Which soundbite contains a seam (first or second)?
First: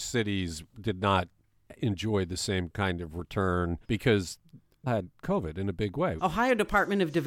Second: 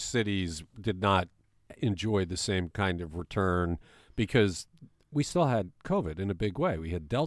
first